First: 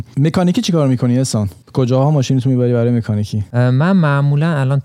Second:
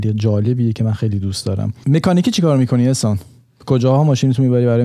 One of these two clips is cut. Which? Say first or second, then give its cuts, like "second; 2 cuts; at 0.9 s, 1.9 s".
first; 1 cut; at 1.6 s